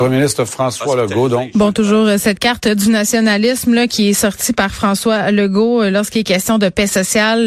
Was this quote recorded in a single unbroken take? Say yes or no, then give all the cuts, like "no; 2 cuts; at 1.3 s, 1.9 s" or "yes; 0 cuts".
yes; 0 cuts